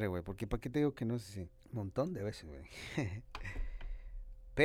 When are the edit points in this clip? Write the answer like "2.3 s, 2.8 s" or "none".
1.6 s